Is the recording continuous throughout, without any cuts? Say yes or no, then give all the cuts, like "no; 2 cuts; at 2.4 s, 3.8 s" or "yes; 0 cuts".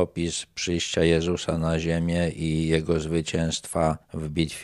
yes; 0 cuts